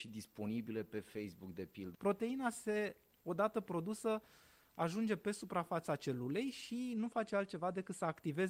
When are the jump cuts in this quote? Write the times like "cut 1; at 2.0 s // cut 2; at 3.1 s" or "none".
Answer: cut 1; at 1.9 s

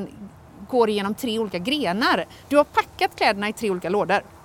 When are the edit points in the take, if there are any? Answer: none

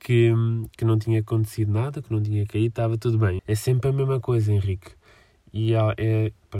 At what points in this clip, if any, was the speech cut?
cut 1; at 3.4 s

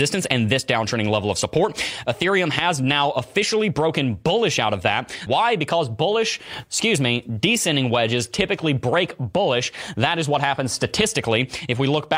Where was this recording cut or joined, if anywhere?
cut 1; at 5.3 s

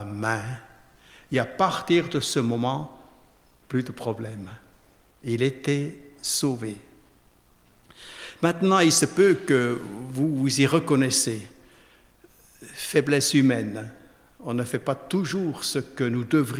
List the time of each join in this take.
none

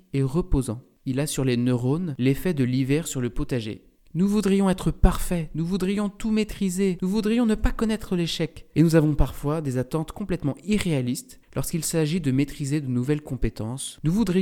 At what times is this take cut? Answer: cut 1; at 4.0 s

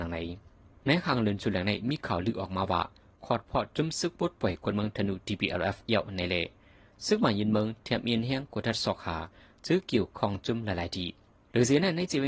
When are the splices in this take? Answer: none

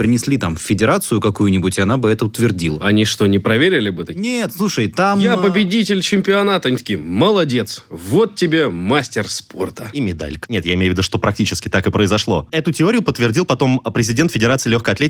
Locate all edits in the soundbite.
cut 1; at 10.4 s // cut 2; at 12.5 s

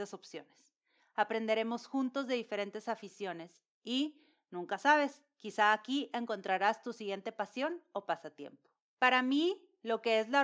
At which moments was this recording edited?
cut 1; at 8.9 s

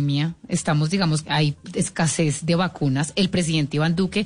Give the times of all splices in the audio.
cut 1; at 1.2 s

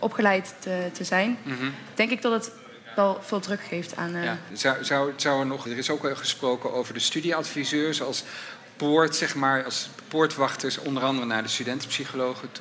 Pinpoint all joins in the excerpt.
cut 1; at 4.5 s // cut 2; at 5.7 s

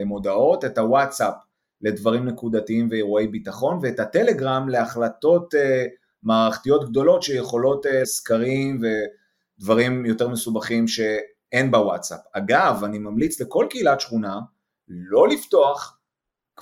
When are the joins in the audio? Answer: cut 1; at 8.0 s

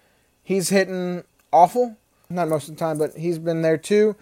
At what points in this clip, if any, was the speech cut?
cut 1; at 2.3 s

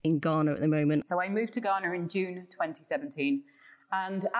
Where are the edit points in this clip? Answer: cut 1; at 1.0 s

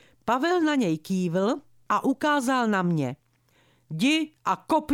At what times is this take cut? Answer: none

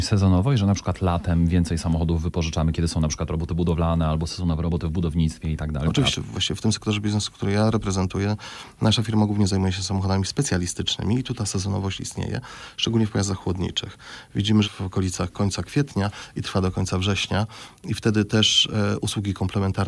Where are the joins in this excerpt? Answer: cut 1; at 6.1 s // cut 2; at 14.6 s

